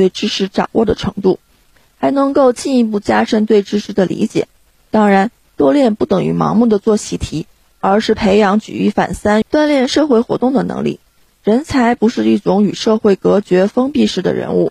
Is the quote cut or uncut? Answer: cut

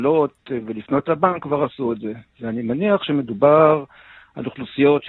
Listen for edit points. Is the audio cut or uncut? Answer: uncut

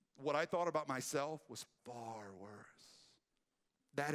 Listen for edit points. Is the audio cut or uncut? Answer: cut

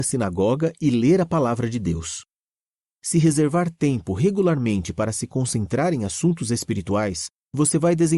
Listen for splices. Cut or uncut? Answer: cut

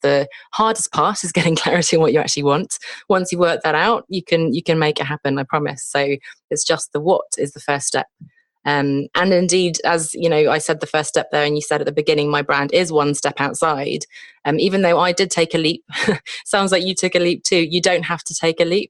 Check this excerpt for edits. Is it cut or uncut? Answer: uncut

